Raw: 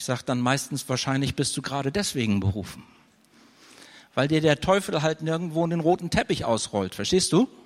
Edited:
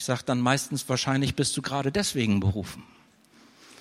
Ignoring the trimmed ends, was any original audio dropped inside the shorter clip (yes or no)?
no